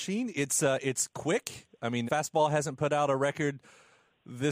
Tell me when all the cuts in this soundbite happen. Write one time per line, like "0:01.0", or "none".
0:02.1